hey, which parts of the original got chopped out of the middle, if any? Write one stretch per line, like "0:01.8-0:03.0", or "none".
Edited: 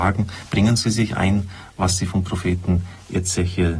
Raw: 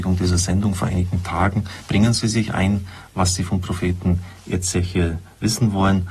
none